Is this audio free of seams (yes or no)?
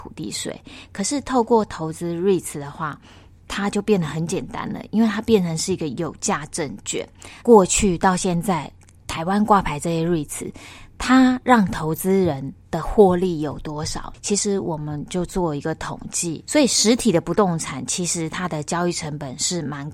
no